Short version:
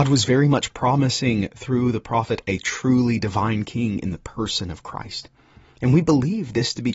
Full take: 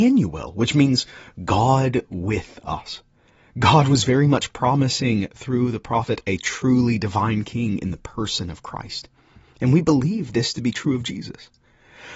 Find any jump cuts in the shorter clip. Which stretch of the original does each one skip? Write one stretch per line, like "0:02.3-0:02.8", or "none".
none